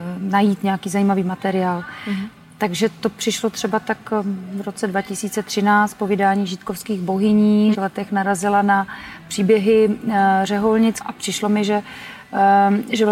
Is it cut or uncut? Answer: cut